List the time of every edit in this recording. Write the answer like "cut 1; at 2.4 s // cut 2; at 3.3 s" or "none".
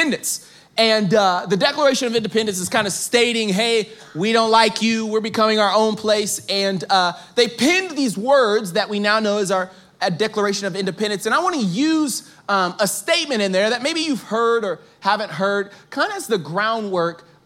none